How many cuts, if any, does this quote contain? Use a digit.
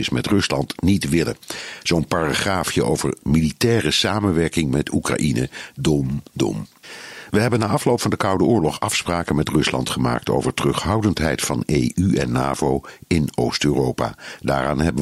1